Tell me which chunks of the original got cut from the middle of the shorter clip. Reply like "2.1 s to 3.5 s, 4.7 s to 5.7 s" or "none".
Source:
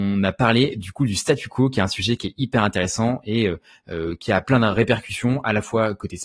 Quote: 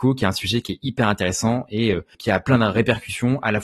3.7 s to 4.2 s